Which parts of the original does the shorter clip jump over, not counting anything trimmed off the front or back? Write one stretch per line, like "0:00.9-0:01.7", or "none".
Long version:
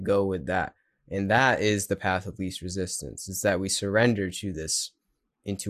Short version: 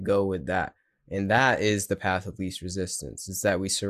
none